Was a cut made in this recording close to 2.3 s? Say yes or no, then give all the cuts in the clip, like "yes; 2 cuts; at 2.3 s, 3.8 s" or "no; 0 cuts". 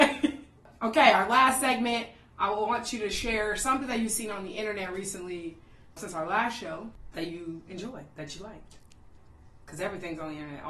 no; 1 cut; at 6.0 s